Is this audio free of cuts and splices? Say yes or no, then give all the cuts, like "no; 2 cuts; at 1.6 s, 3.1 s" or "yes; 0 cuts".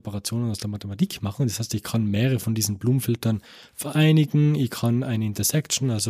yes; 0 cuts